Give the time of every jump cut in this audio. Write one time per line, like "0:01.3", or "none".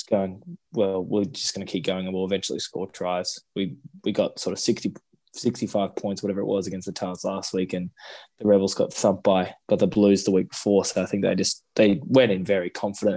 none